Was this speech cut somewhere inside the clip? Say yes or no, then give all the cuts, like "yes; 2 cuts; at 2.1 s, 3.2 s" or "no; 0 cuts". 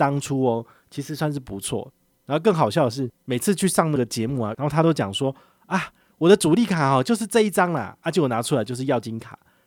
yes; 2 cuts; at 3.2 s, 4.5 s